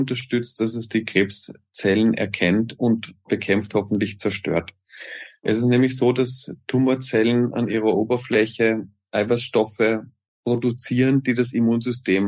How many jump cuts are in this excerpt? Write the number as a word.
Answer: zero